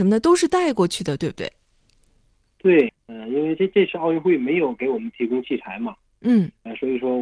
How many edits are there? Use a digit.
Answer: 0